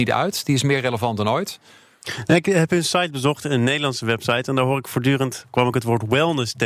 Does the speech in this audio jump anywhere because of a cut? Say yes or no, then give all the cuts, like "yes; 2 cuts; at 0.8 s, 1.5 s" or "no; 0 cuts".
no; 0 cuts